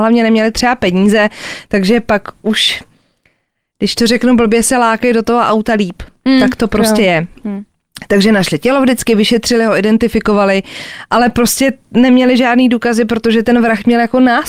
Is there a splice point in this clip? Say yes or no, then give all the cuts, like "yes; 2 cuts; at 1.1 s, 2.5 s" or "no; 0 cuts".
no; 0 cuts